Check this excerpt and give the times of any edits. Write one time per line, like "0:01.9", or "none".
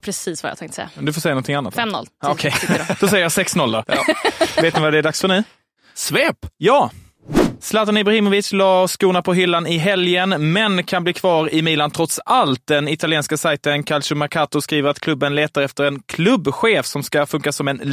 none